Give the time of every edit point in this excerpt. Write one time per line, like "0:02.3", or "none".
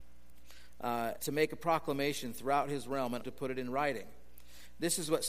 0:01.2
0:03.2